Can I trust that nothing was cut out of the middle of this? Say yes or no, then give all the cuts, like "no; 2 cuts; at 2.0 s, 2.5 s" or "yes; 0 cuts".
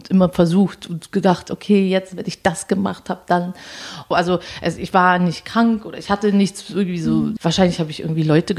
no; 2 cuts; at 4.1 s, 7.4 s